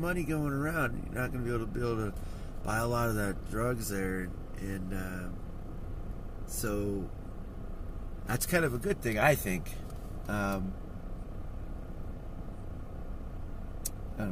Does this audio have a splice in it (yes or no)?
no